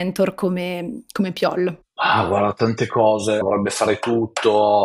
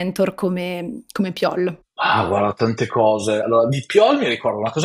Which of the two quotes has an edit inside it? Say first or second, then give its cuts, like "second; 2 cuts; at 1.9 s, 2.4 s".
first; 1 cut; at 3.4 s